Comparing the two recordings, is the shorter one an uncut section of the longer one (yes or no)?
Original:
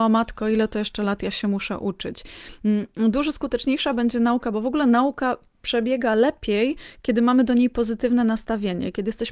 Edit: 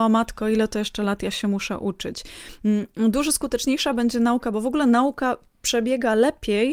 yes